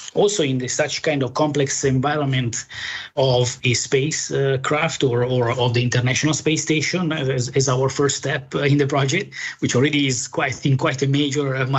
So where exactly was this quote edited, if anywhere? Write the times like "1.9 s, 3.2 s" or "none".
none